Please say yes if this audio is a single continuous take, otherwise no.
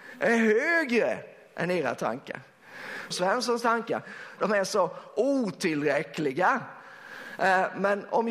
no